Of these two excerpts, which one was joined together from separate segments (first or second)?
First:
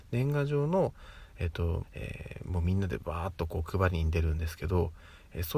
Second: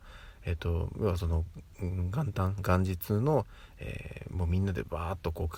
first